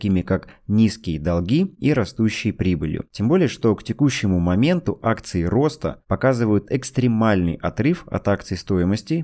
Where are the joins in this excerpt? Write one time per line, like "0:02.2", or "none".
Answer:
none